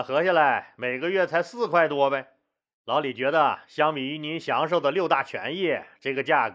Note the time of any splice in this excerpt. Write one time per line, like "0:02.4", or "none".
none